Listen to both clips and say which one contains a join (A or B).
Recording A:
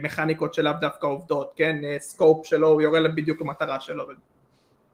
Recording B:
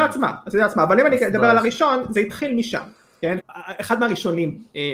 B